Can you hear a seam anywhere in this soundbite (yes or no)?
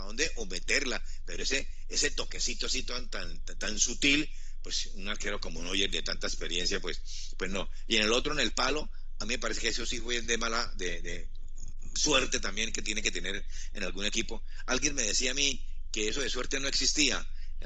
no